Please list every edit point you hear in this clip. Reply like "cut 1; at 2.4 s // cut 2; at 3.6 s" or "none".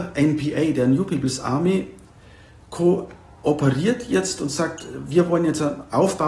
none